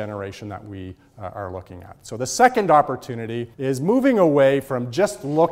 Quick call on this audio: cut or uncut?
cut